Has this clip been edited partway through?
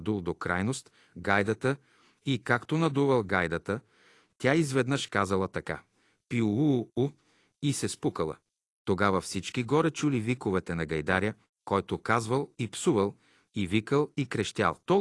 no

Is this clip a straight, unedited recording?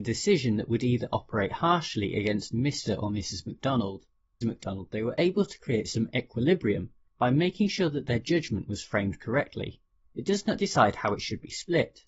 no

